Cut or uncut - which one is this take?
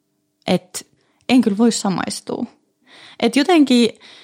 uncut